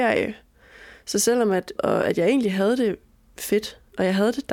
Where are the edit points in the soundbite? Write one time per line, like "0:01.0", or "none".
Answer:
0:01.8